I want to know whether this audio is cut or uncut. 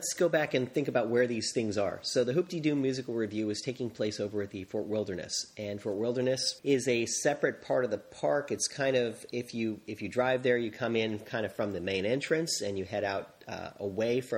cut